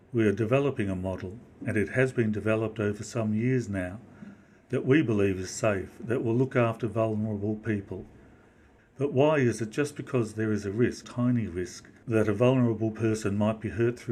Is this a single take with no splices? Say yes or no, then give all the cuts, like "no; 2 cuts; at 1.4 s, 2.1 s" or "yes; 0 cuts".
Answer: no; 1 cut; at 11.0 s